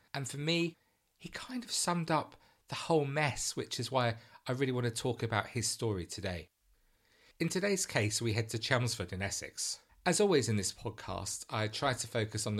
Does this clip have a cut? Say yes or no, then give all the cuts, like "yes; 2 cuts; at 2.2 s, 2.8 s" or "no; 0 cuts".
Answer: yes; 1 cut; at 9.9 s